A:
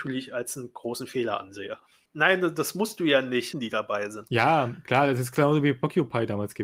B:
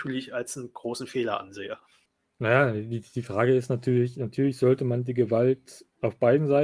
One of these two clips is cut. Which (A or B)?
A